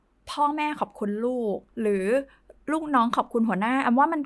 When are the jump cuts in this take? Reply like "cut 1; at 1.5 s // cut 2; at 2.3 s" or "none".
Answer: cut 1; at 1.7 s